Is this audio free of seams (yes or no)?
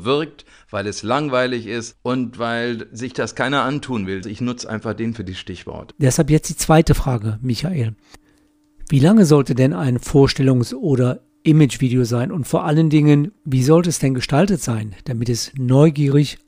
no